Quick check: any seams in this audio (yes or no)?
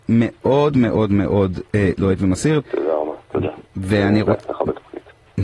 yes